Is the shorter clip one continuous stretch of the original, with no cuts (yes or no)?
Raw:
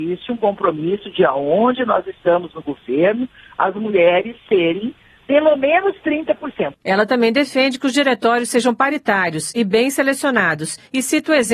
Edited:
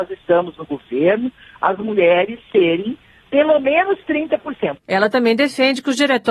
yes